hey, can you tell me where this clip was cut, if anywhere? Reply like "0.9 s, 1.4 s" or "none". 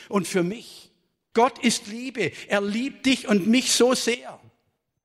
1.3 s